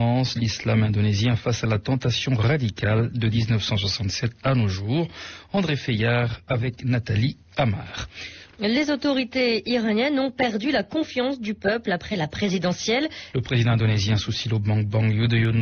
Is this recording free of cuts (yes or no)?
no